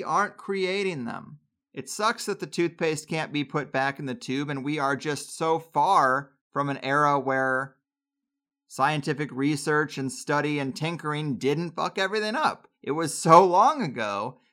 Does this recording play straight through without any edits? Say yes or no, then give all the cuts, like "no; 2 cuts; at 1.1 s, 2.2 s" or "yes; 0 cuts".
no; 1 cut; at 1.6 s